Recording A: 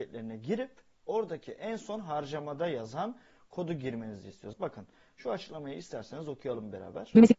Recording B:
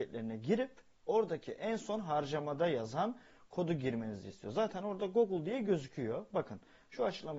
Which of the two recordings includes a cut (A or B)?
A